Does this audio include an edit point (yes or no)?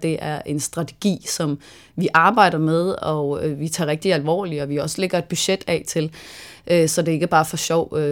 no